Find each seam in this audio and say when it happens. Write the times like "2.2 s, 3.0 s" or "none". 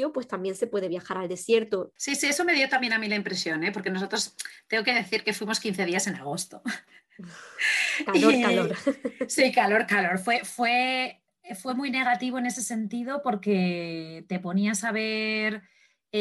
2.0 s